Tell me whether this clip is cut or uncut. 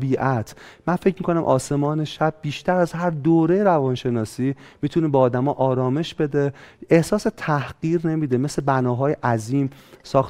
uncut